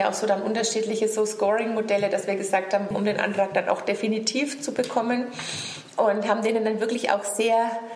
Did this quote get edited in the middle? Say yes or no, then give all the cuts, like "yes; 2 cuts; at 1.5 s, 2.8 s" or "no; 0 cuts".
yes; 1 cut; at 2.9 s